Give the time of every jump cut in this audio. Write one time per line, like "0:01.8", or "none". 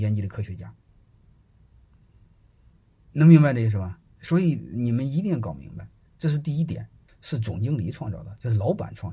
0:07.1